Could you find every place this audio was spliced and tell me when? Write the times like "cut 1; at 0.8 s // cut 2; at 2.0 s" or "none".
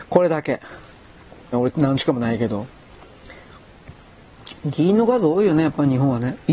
cut 1; at 1.5 s